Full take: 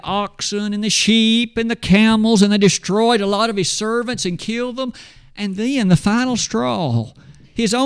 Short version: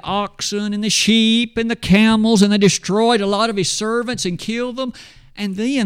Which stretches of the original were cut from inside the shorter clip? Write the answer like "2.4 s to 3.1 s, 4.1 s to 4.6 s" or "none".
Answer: none